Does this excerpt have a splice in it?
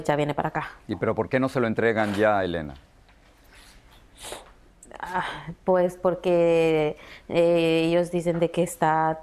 no; 0 cuts

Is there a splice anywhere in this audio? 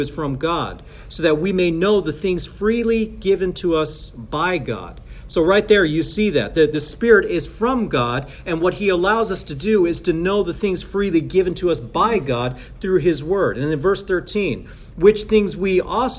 no; 0 cuts

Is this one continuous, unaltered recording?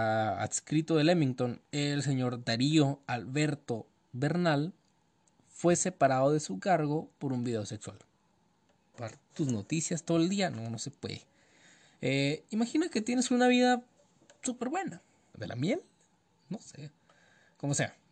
no; 2 cuts; at 8.9 s, 15.3 s

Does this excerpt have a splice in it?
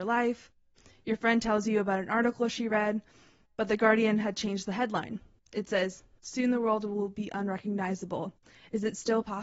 no; 0 cuts

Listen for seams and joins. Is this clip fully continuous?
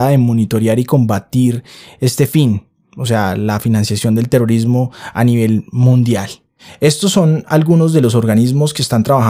yes; 0 cuts

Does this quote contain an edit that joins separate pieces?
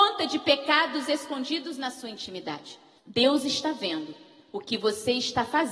yes; 1 cut; at 3.0 s

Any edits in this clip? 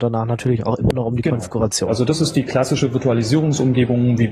no; 0 cuts

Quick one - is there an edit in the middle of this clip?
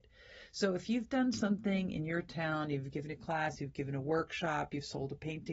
no; 0 cuts

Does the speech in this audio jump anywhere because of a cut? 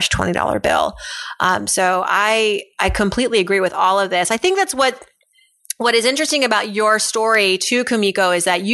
no; 0 cuts

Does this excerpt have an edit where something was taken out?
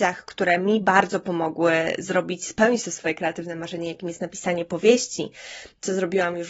no; 0 cuts

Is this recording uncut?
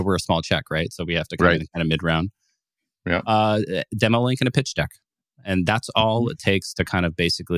yes; 0 cuts

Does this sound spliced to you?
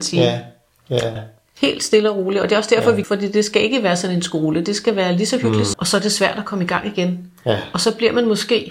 yes; 3 cuts; at 1.2 s, 3.0 s, 5.7 s

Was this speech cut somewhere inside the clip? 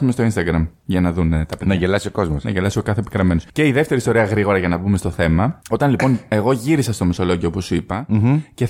no; 0 cuts

